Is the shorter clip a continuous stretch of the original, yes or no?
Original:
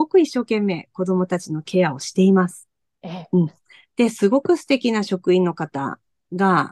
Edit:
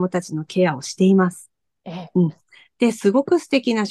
yes